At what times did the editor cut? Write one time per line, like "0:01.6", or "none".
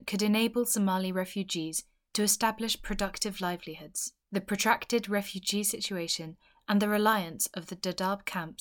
0:04.2